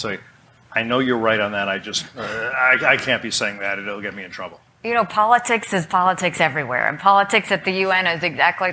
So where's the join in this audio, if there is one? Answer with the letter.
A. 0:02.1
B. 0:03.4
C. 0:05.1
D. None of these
D